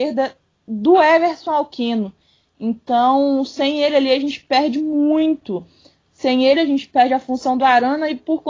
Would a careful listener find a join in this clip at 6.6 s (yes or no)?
yes